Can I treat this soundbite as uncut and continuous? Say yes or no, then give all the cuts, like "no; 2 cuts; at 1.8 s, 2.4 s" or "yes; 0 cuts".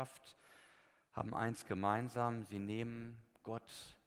yes; 0 cuts